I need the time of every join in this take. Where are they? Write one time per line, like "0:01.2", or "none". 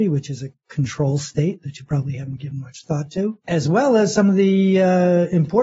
none